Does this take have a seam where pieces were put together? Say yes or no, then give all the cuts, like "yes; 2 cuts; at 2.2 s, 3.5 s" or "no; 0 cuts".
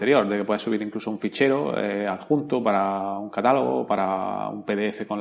no; 0 cuts